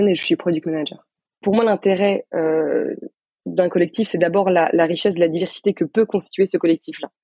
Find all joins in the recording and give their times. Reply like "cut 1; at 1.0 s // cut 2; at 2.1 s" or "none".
none